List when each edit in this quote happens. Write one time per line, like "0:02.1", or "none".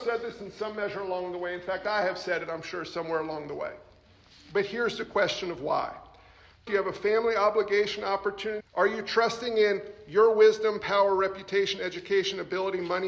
0:06.7
0:08.6